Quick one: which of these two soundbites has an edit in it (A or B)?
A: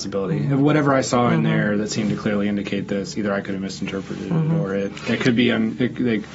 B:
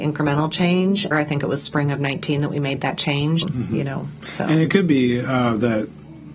B